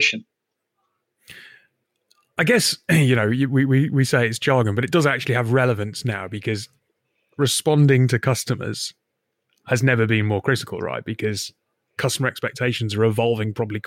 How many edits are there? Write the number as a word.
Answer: zero